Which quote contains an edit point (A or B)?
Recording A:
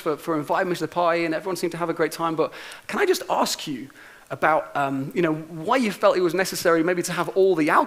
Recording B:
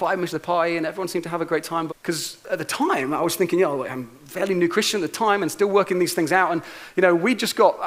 B